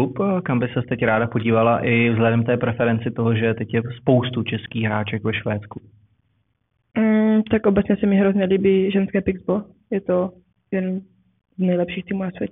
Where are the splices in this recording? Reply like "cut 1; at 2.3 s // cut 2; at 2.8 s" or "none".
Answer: none